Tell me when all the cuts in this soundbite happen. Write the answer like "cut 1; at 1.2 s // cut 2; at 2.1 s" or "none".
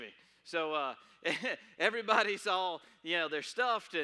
none

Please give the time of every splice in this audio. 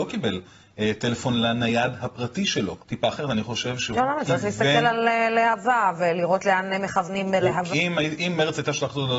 cut 1; at 2.8 s // cut 2; at 7.7 s

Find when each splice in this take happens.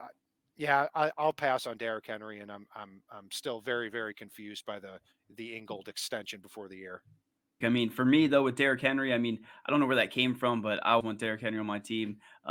cut 1; at 7.6 s // cut 2; at 11.0 s

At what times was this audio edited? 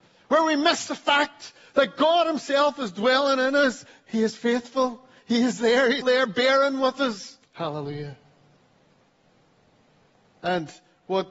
cut 1; at 6.0 s // cut 2; at 7.4 s

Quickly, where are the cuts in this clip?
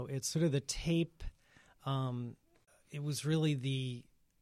cut 1; at 2.9 s

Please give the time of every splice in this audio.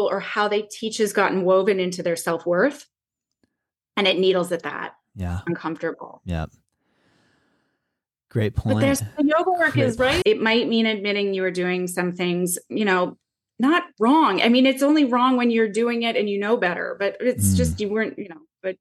cut 1; at 5.5 s // cut 2; at 10.2 s

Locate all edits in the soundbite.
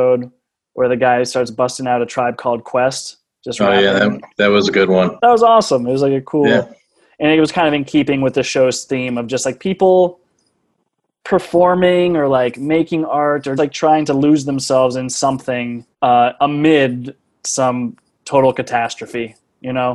cut 1; at 13.6 s // cut 2; at 15.9 s

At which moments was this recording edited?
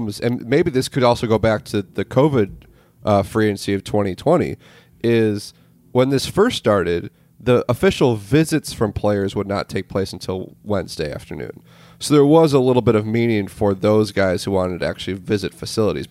none

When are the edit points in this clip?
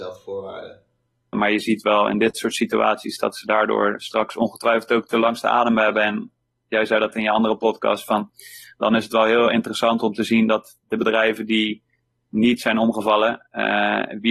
cut 1; at 1.3 s

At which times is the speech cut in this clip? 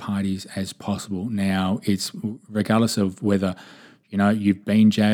none

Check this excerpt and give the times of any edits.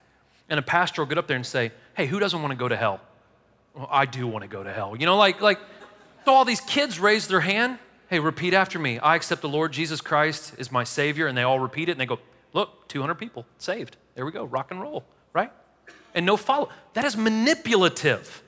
cut 1; at 6.3 s

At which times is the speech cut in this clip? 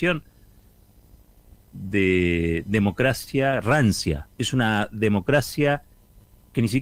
cut 1; at 4.3 s

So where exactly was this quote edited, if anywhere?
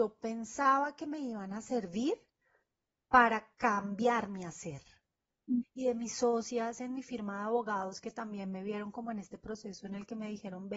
cut 1; at 5.6 s

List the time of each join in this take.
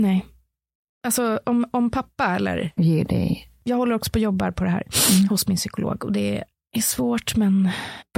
cut 1; at 2.8 s

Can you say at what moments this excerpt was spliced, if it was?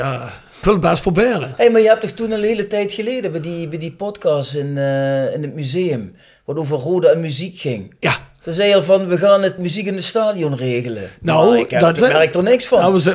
cut 1; at 12.0 s

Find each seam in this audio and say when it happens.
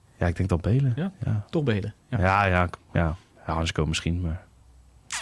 none

